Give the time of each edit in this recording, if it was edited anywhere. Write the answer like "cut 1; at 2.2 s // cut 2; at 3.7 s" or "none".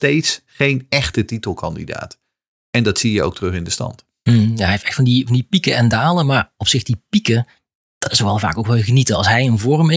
none